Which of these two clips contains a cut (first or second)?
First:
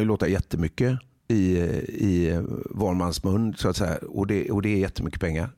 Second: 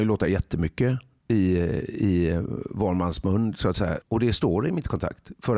second